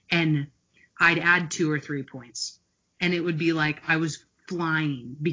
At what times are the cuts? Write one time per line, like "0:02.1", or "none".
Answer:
none